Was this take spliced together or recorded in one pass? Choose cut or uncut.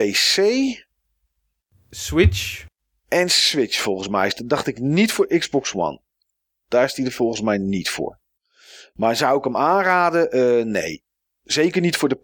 uncut